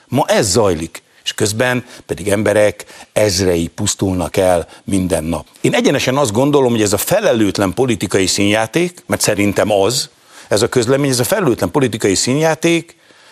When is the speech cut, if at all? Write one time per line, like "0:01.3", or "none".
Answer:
0:05.5